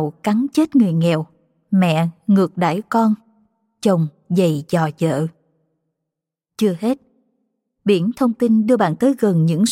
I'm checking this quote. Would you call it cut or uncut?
uncut